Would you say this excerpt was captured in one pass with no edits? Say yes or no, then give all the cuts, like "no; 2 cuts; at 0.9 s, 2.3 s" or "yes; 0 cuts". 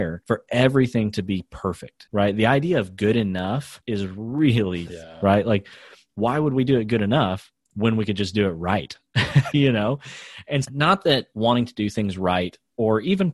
no; 3 cuts; at 4.9 s, 9.5 s, 10.6 s